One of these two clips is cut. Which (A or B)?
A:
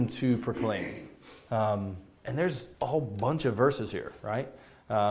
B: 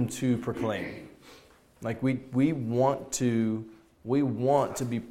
A